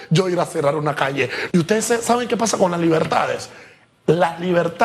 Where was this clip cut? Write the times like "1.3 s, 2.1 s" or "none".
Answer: 1.5 s

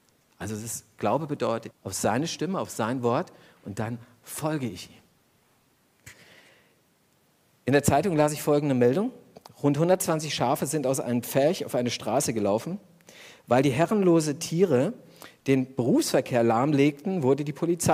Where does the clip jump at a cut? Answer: 1.7 s

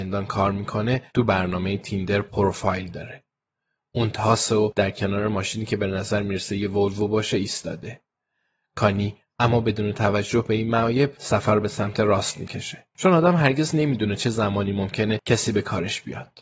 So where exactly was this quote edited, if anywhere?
none

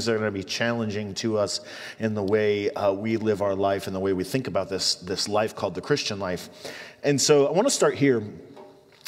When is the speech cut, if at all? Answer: none

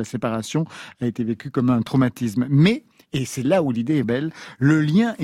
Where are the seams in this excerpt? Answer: 4.0 s

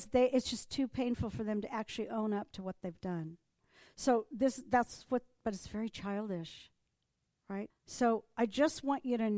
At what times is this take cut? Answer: 7.7 s

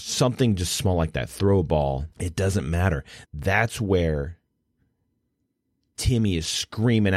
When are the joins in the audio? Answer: 2.1 s, 3.2 s

